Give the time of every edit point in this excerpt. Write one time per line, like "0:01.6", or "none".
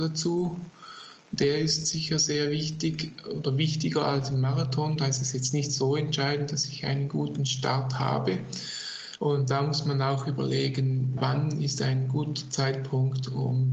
0:09.2
0:11.2